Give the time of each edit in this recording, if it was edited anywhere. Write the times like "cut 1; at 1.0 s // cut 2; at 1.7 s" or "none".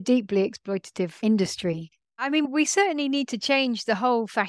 none